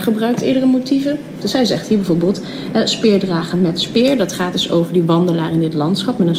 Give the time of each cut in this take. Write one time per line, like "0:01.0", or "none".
0:01.4